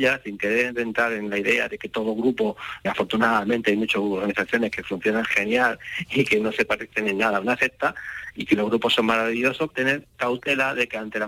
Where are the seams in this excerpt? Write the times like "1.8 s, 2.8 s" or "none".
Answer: 2.8 s, 9.7 s